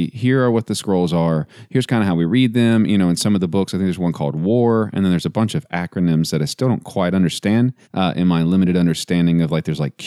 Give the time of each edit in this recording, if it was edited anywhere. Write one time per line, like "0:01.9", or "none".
0:07.8